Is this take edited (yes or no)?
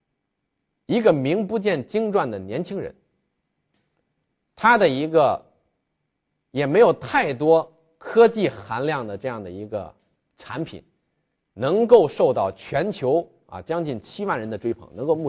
no